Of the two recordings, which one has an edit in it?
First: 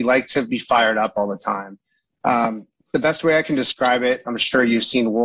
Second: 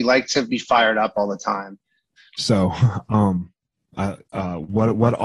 second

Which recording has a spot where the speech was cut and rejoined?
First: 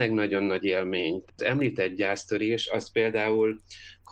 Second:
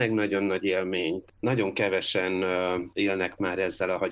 second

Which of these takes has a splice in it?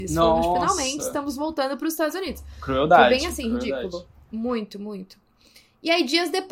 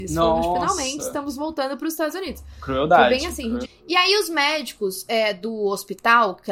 second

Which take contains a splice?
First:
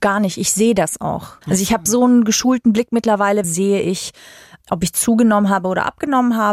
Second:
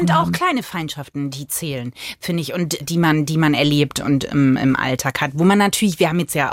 first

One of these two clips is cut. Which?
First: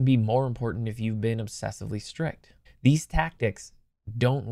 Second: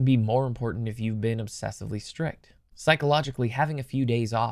first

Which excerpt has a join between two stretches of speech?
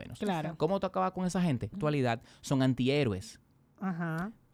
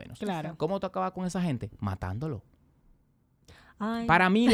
first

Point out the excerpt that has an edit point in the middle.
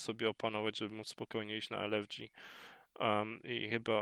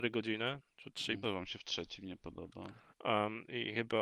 second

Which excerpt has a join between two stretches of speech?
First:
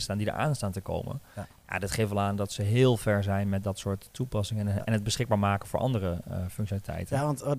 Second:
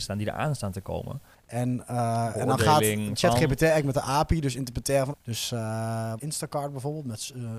second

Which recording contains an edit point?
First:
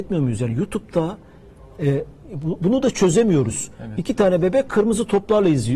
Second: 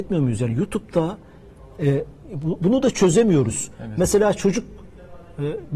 first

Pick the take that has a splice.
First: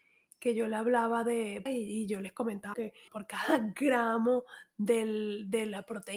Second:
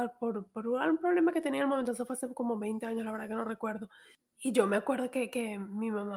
first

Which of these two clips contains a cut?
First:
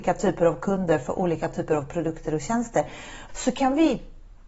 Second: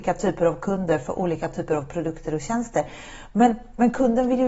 first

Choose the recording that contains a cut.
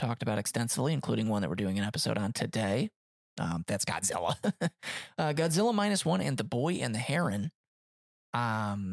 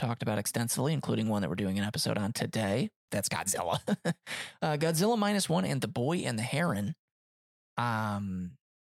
second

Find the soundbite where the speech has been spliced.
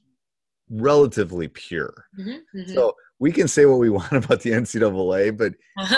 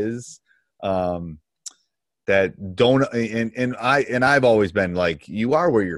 first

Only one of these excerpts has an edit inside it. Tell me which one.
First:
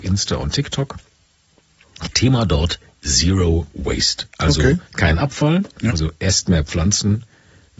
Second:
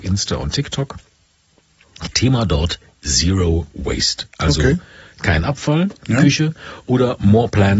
first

